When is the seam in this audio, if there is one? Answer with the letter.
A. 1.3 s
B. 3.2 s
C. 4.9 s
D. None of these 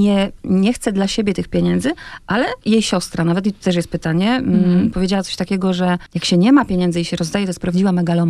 D